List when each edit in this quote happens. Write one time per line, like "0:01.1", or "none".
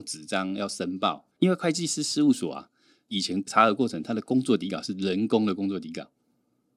0:01.4